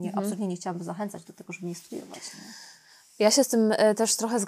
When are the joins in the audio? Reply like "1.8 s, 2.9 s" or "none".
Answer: none